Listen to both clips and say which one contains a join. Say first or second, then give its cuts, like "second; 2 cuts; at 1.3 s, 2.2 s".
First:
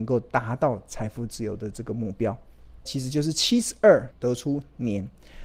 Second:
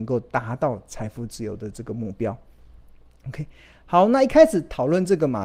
first; 2 cuts; at 2.8 s, 4.1 s